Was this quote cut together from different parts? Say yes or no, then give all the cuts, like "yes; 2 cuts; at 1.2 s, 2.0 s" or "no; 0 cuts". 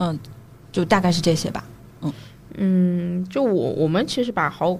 no; 0 cuts